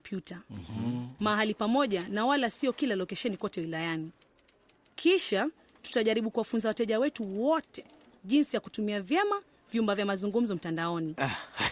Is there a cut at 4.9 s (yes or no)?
no